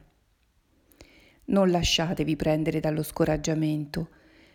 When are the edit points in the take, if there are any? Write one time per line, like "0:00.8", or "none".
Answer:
none